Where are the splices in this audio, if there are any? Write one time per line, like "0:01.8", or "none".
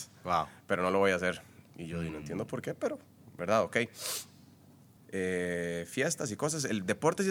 0:05.0